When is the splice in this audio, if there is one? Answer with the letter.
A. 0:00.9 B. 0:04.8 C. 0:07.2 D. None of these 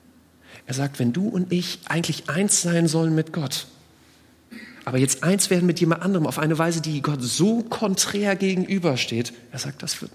D